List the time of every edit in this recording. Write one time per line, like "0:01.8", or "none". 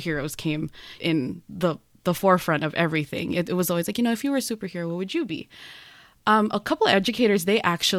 0:01.0